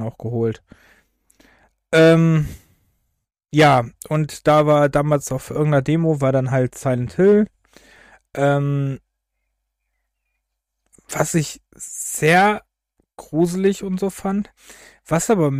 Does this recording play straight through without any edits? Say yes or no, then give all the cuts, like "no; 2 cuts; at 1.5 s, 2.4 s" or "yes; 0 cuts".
yes; 0 cuts